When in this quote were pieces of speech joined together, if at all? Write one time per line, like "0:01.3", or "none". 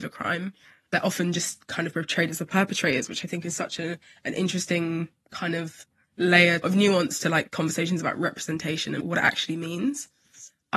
none